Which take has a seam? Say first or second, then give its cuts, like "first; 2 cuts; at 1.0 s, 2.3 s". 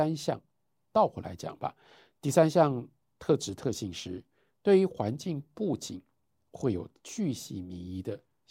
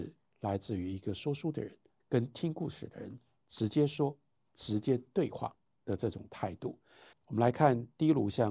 second; 2 cuts; at 2.0 s, 7.1 s